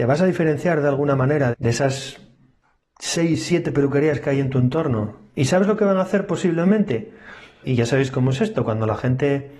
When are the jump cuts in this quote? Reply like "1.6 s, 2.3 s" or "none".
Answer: 1.5 s, 5.3 s, 7.6 s